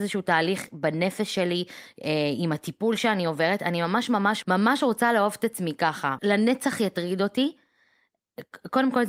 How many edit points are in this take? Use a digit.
2